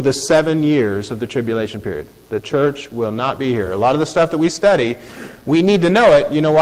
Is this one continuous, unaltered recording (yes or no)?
yes